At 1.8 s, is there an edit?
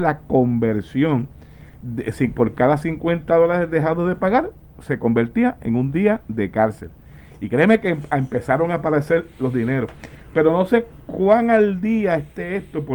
yes; 1 cut; at 1.8 s

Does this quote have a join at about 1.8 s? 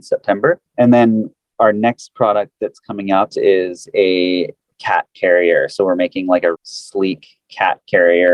no; 2 cuts; at 3.3 s, 6.5 s

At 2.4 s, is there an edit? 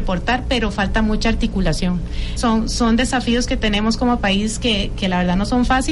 yes; 1 cut; at 2.4 s

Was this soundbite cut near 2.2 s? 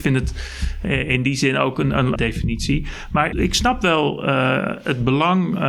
yes; 2 cuts; at 2.2 s, 3.3 s

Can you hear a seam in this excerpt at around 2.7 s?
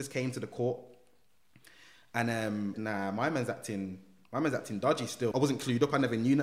yes; 2 cuts; at 2.7 s, 5.3 s

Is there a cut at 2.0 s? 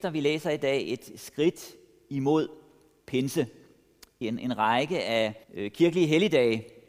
no; 2 cuts; at 4.2 s, 5.4 s

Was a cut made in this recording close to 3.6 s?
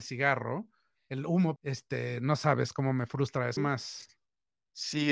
yes; 2 cuts; at 1.6 s, 3.6 s

